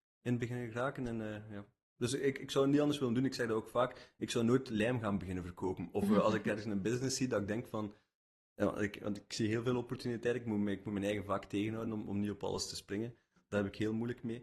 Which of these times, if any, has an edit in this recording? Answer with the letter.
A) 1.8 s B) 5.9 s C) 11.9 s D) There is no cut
D